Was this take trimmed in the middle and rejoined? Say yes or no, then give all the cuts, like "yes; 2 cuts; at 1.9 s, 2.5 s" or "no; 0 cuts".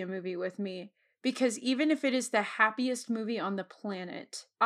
no; 0 cuts